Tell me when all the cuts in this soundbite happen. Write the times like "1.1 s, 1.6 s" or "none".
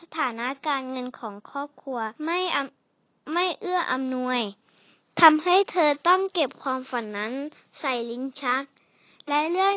2.2 s